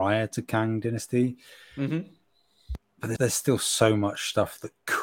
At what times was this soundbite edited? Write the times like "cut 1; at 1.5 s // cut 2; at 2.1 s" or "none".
cut 1; at 3.2 s